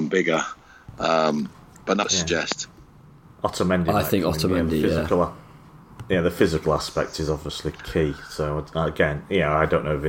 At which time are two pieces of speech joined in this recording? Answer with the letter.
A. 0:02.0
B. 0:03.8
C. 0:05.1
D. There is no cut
A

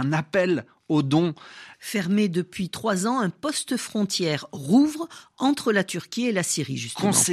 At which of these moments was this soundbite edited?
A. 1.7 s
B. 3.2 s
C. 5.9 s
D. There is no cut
A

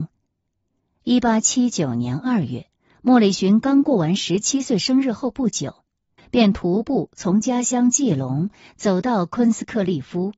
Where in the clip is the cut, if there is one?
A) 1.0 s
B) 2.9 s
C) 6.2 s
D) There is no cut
C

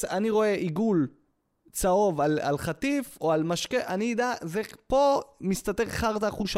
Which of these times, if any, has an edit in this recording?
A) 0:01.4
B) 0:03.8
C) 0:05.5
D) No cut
D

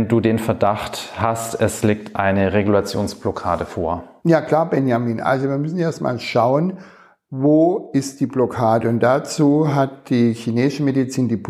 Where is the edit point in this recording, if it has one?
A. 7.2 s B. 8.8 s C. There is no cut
C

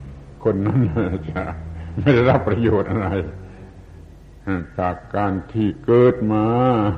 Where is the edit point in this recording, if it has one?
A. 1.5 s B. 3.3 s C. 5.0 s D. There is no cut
D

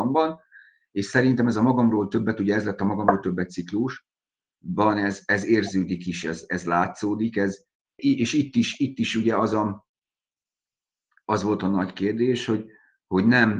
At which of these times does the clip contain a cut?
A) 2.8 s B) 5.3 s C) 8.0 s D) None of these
C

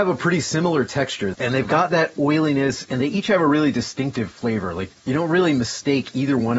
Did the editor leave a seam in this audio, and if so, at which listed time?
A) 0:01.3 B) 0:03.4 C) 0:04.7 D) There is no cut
A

